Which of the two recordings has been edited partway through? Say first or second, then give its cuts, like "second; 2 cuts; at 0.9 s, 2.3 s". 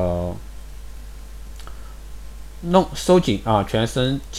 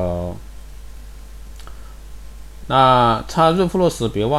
second; 1 cut; at 2.6 s